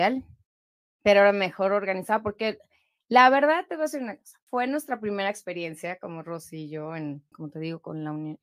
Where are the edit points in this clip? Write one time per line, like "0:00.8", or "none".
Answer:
0:04.5
0:07.3

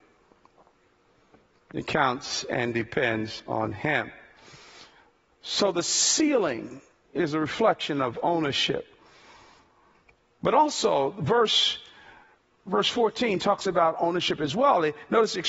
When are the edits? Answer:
none

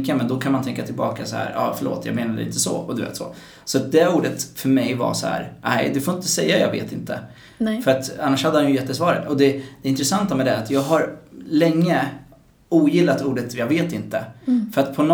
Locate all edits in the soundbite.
0:07.5

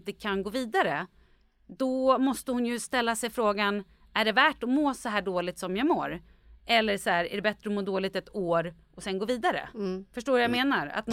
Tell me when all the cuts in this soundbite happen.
none

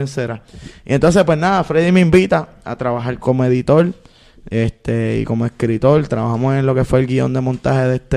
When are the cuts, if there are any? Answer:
0:03.2

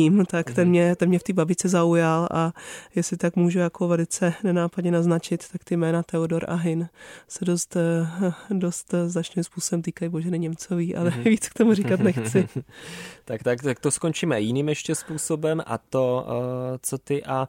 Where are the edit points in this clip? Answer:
none

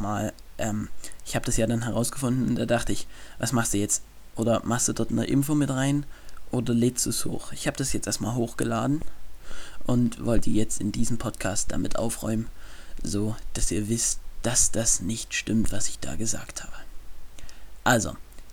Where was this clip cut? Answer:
0:04.3

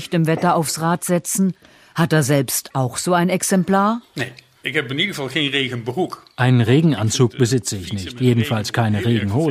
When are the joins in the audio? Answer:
none

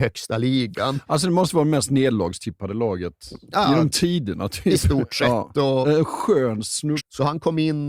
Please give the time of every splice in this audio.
0:05.8
0:07.0

